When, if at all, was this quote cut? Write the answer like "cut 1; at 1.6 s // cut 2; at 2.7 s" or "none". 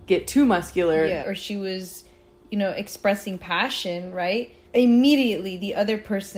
cut 1; at 1.2 s // cut 2; at 4.6 s